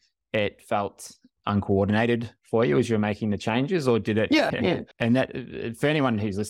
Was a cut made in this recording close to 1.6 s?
no; 1 cut; at 4.5 s

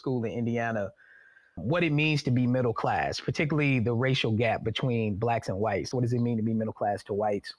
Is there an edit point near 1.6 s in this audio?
yes; 2 cuts; at 1.6 s, 5.9 s

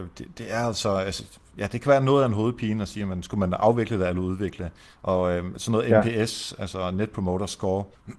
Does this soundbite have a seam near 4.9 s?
no; 0 cuts

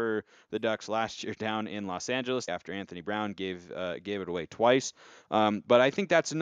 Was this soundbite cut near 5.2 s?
no; 1 cut; at 2.5 s

